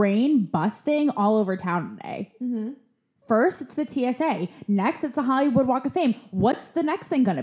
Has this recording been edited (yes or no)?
no